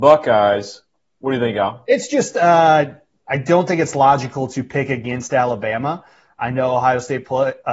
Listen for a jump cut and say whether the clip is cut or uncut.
uncut